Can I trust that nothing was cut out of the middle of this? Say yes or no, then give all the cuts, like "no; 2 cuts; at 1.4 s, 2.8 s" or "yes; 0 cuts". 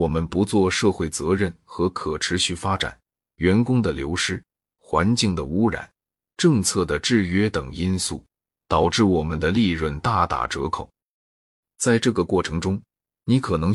no; 1 cut; at 3.2 s